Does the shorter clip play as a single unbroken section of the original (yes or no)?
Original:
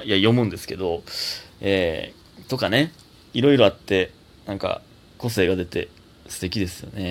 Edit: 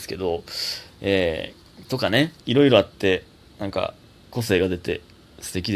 no